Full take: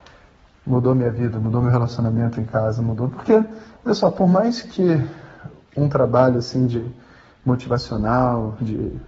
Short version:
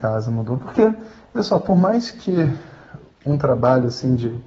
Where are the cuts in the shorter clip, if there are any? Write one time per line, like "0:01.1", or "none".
none